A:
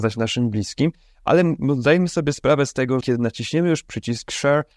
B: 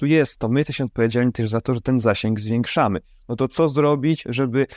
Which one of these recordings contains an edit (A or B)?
A